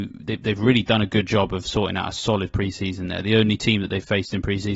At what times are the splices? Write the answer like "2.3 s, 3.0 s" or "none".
none

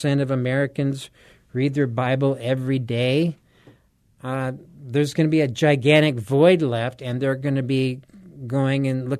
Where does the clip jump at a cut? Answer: none

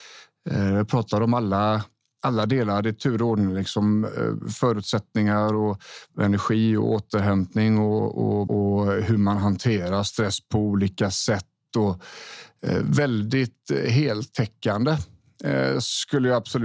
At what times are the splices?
8.5 s

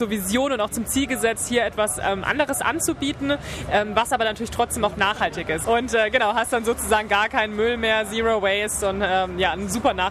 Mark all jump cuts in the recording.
5.6 s

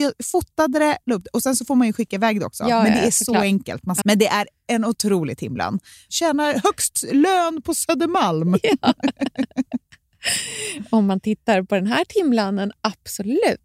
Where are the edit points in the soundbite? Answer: 4.0 s

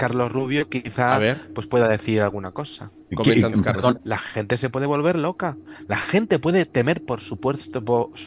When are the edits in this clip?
4.0 s

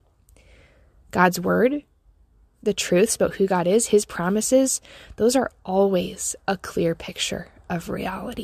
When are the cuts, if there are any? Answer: none

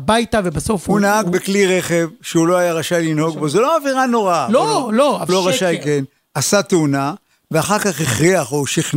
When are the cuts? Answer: 5.3 s

